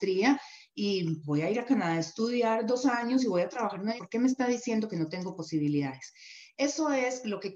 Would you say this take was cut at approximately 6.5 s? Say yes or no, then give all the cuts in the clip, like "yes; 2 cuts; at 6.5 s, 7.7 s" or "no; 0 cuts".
no; 2 cuts; at 1.2 s, 4.0 s